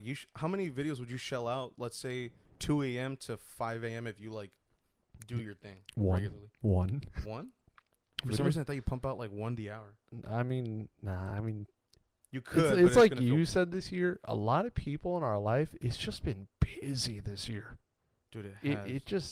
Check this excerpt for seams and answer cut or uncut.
cut